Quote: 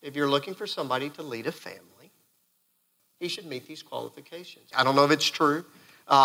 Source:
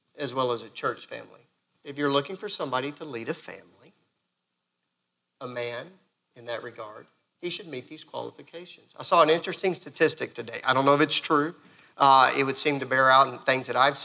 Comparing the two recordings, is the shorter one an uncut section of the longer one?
no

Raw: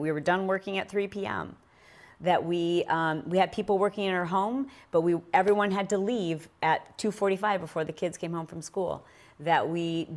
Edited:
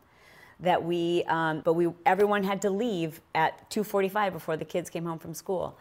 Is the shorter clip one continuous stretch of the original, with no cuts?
no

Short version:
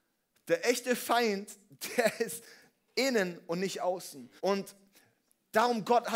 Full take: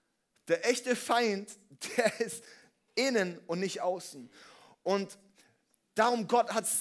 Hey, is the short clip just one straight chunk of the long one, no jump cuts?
no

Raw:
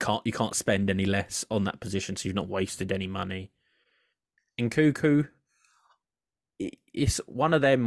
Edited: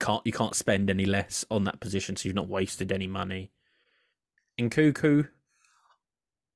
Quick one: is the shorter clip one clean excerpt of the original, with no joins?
yes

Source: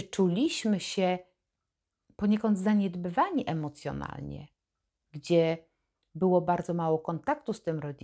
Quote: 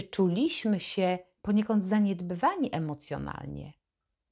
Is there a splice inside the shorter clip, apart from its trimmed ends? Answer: yes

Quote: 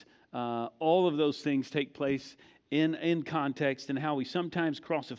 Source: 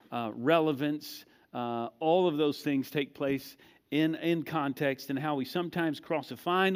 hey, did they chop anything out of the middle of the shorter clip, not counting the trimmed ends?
no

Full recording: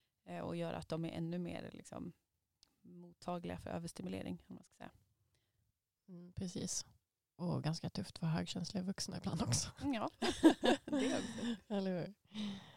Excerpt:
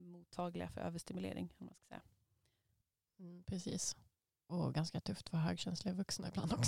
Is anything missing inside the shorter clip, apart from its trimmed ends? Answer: no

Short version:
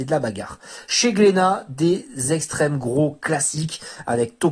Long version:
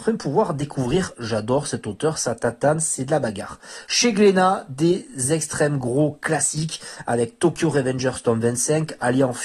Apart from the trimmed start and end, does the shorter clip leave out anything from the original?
no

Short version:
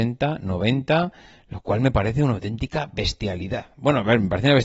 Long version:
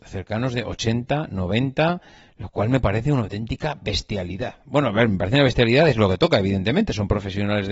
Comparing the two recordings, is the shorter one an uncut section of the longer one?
yes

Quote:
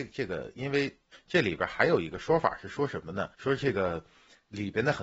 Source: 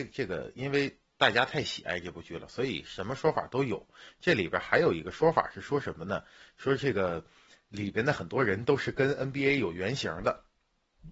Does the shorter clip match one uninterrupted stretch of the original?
no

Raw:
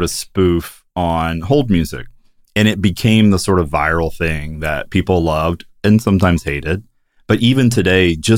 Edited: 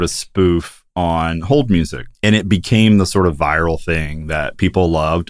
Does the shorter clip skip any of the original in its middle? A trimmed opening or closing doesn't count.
yes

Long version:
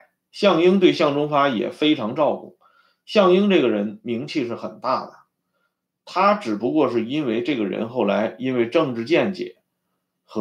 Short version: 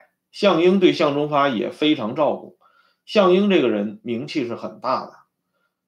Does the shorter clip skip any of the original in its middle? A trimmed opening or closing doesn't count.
no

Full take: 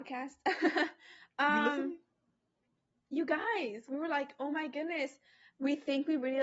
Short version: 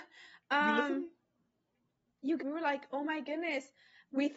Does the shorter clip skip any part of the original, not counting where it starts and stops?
yes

